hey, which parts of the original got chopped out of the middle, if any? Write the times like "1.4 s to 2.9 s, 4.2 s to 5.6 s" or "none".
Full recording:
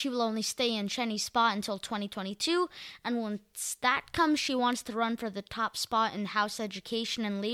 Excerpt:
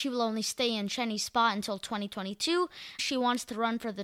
3.0 s to 4.4 s